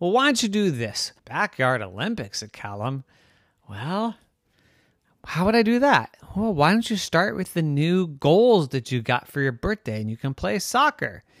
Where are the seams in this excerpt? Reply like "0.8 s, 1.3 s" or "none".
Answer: 1.2 s